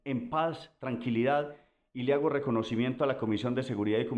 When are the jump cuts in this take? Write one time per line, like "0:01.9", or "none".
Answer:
none